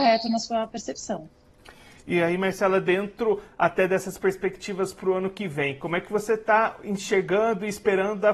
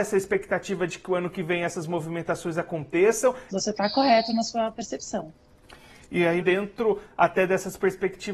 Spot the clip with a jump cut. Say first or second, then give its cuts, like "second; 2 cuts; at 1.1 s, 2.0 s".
second; 2 cuts; at 3.5 s, 6.4 s